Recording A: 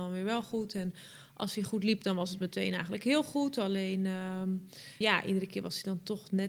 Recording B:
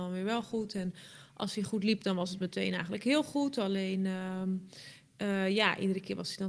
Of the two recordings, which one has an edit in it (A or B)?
A